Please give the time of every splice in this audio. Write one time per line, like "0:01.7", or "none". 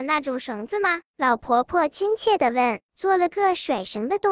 0:02.9